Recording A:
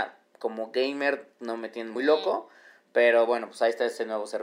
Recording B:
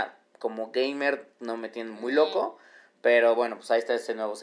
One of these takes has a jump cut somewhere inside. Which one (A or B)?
A